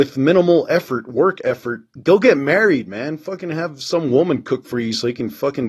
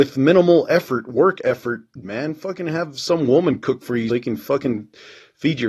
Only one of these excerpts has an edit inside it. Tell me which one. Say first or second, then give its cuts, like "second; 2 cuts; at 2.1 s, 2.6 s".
second; 2 cuts; at 2.0 s, 4.1 s